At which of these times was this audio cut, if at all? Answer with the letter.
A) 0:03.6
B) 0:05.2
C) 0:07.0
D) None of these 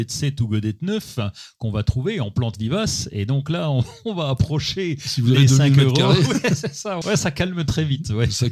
C